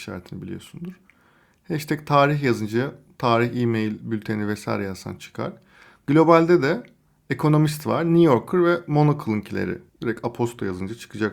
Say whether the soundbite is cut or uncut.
cut